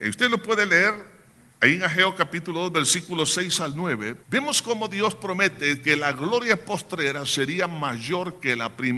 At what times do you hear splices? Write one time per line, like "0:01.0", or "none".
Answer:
0:04.2